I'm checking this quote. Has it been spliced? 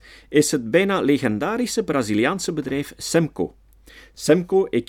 no; 0 cuts

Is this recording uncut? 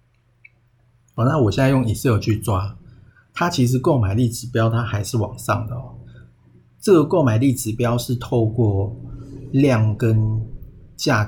yes; 0 cuts

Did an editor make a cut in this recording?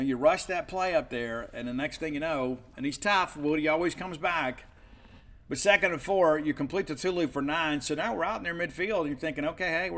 yes; 1 cut; at 2.7 s

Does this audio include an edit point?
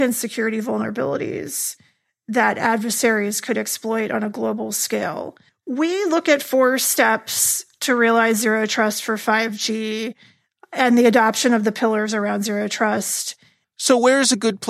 yes; 2 cuts; at 5.5 s, 13.6 s

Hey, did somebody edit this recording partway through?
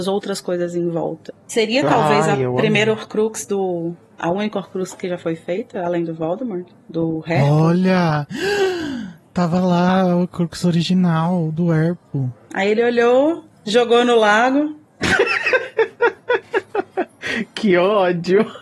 no; 0 cuts

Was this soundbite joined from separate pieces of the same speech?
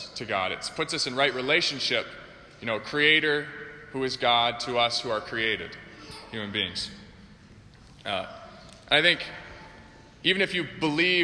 no; 0 cuts

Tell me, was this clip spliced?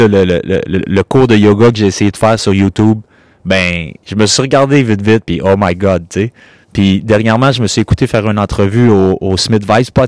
no; 0 cuts

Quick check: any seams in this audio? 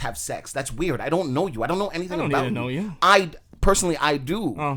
no; 0 cuts

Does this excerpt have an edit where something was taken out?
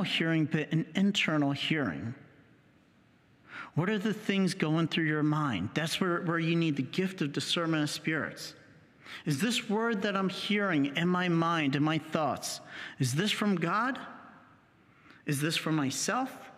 no; 0 cuts

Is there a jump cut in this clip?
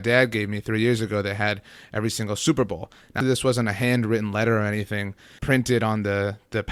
yes; 2 cuts; at 3.2 s, 5.4 s

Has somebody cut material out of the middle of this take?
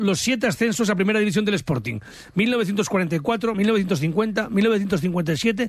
no; 0 cuts

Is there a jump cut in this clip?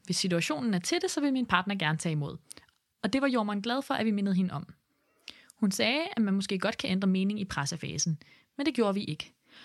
no; 0 cuts

